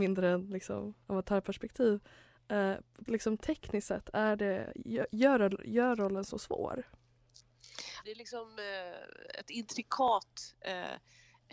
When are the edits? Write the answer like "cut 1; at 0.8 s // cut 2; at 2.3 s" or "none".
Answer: cut 1; at 3.1 s // cut 2; at 8.0 s